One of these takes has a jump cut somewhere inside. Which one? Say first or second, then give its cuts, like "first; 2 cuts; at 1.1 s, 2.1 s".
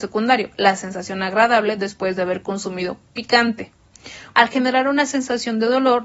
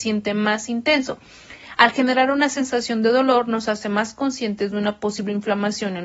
first; 1 cut; at 4.3 s